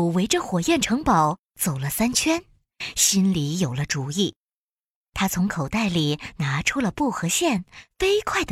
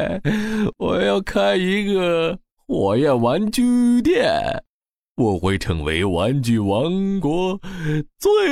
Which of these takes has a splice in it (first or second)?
second